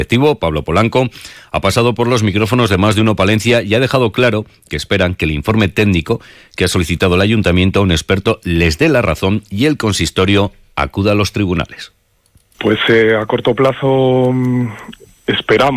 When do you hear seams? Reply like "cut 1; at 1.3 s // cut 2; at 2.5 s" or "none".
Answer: none